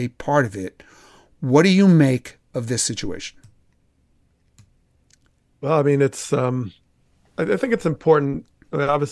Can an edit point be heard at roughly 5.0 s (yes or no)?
no